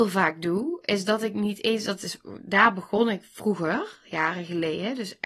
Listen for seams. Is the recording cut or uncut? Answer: uncut